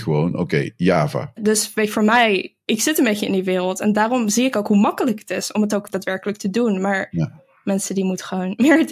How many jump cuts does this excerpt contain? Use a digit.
1